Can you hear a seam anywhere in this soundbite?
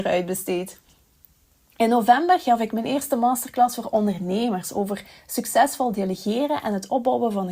no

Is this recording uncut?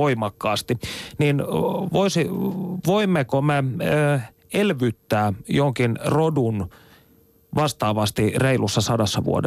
yes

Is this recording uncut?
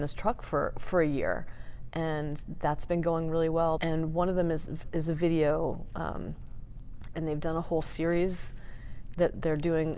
no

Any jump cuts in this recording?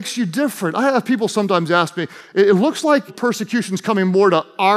yes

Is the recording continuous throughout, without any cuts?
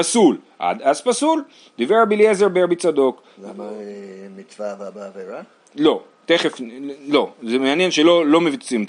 yes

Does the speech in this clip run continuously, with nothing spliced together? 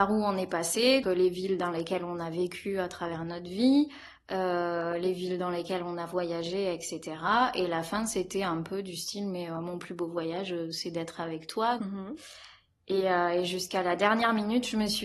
no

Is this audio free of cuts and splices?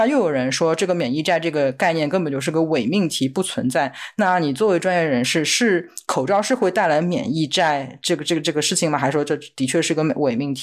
yes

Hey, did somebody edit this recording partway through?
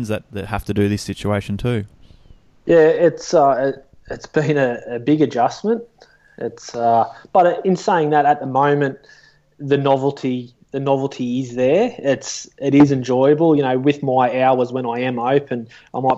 no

